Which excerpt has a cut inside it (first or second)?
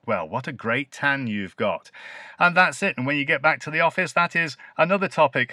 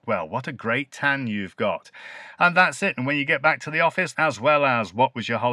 second